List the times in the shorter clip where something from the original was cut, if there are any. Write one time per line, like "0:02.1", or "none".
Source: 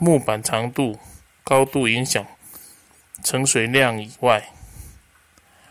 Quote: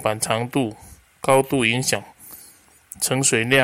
none